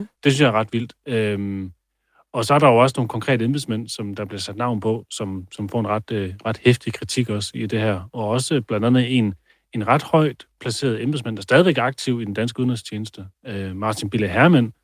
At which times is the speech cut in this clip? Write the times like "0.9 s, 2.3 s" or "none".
none